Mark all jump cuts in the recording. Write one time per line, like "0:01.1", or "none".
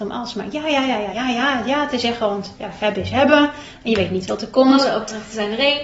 0:01.1